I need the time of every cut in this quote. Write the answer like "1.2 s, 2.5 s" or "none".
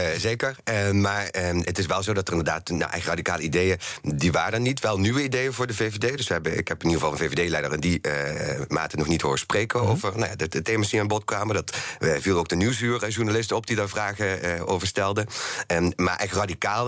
none